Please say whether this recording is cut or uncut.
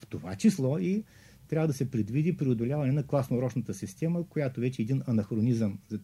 uncut